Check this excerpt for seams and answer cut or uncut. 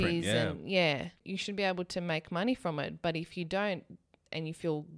uncut